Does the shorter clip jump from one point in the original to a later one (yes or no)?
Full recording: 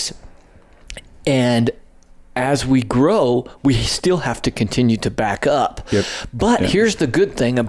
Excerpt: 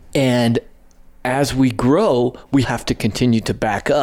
yes